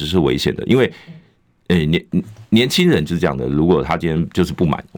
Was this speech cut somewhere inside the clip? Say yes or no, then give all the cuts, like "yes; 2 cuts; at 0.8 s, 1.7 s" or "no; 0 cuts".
no; 0 cuts